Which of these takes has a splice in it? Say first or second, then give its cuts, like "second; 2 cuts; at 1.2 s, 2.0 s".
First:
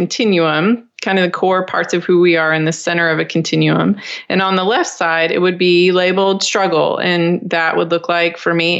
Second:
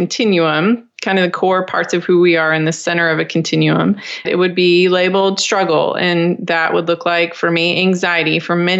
second; 1 cut; at 4.2 s